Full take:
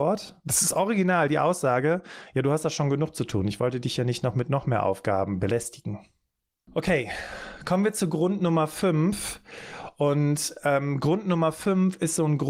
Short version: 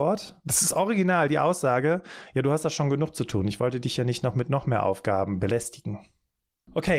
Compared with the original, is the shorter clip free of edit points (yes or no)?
yes